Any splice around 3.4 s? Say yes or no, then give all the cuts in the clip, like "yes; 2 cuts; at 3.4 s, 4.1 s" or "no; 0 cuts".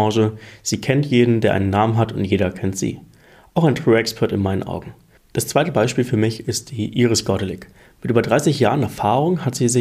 no; 1 cut; at 5.2 s